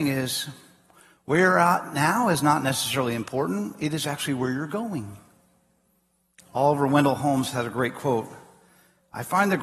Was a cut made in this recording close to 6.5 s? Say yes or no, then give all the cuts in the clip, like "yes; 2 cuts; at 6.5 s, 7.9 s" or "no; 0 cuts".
no; 0 cuts